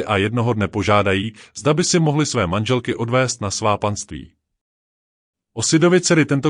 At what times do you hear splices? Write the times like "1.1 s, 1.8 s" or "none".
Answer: 5.3 s